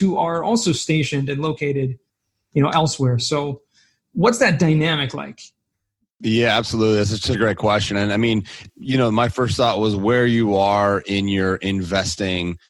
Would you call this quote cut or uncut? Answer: cut